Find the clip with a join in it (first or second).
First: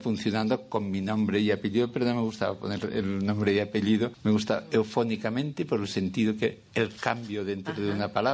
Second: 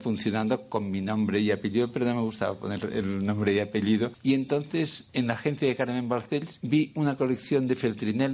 first